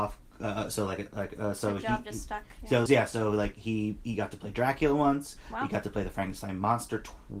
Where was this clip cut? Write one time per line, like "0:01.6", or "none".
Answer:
0:02.9

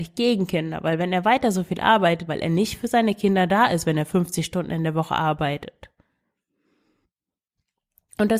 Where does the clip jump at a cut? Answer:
0:02.3

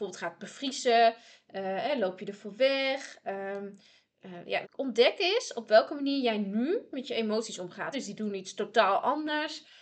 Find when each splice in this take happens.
0:04.6
0:07.9

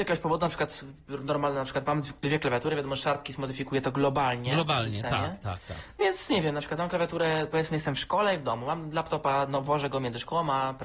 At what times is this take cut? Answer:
none

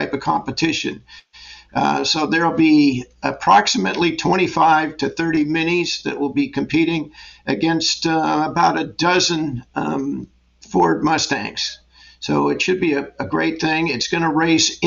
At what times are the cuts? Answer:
none

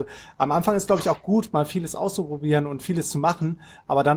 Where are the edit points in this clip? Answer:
none

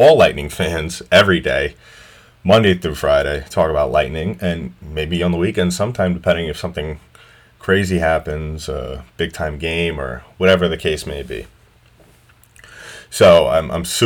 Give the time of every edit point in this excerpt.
none

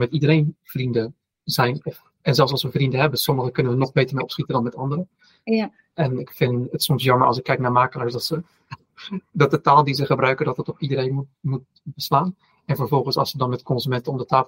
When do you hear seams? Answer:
none

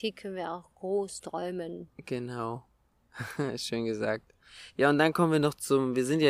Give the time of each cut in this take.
none

